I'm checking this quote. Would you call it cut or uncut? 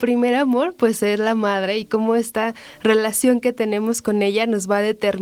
uncut